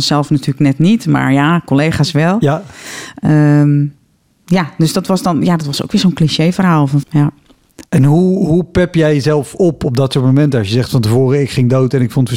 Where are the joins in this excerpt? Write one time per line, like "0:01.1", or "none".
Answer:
0:07.0